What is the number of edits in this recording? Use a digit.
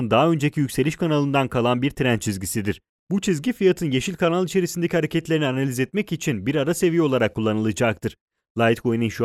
0